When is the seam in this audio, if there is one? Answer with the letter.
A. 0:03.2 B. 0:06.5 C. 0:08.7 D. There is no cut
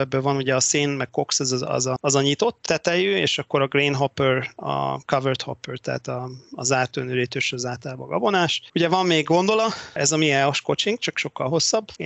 D